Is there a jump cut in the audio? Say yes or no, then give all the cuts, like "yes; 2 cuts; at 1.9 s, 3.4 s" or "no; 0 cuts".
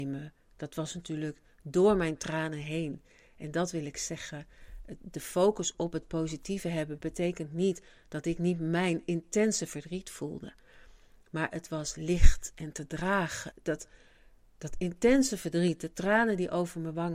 yes; 1 cut; at 13.5 s